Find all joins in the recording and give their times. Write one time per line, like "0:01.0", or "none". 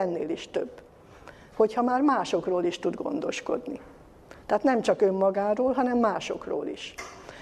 none